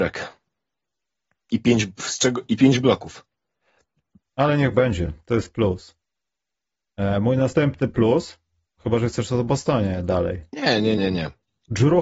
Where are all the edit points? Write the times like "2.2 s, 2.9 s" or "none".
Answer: 4.3 s, 11.0 s